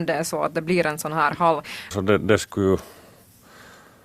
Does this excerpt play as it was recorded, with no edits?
no; 1 cut; at 1.9 s

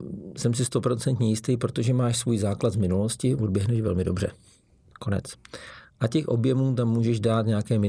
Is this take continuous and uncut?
yes; 0 cuts

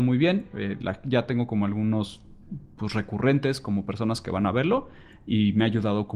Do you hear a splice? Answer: no; 0 cuts

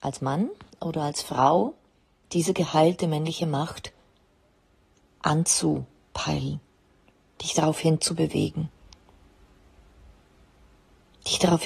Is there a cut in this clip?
yes; 1 cut; at 2.2 s

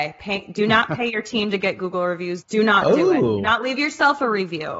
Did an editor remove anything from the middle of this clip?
yes; 1 cut; at 2.4 s

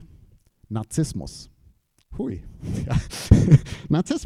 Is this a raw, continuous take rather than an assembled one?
yes; 0 cuts

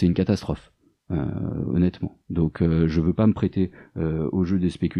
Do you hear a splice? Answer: no; 0 cuts

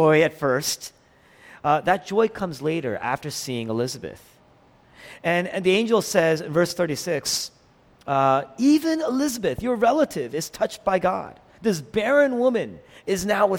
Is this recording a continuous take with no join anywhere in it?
yes; 0 cuts

